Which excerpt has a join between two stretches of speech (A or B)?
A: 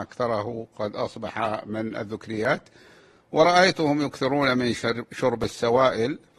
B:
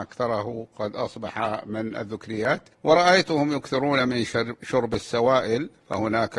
B